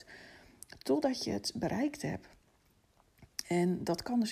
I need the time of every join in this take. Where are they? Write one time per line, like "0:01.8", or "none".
none

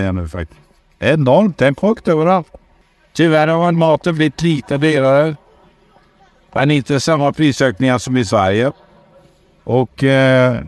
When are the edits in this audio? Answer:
0:09.6

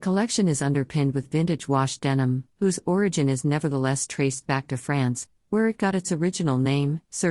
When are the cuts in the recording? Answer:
0:02.6

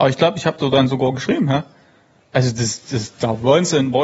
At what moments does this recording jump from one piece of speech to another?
0:02.2

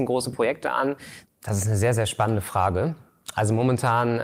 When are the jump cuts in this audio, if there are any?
0:01.2

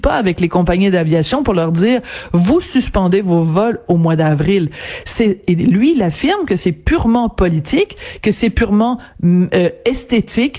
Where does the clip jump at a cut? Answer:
none

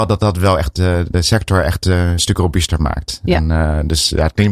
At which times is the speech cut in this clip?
none

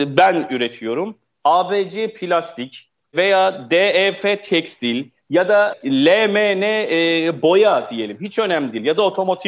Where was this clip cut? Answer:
none

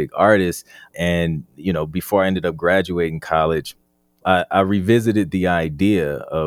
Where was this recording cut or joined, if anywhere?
0:00.9
0:04.2

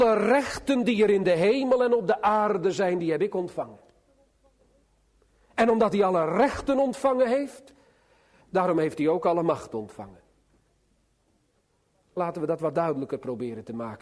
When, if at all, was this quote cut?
none

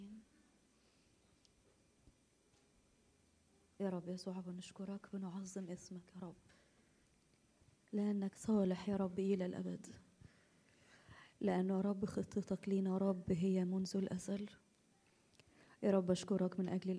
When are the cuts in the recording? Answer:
0:08.3

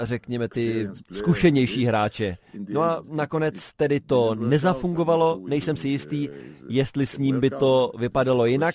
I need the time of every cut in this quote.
none

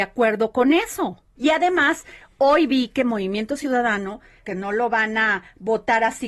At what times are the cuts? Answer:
0:01.4
0:04.4

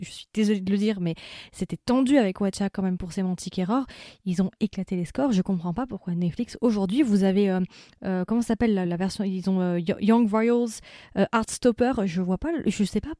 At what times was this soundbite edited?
0:08.8

